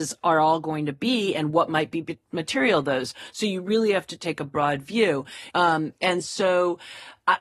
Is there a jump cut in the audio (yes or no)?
yes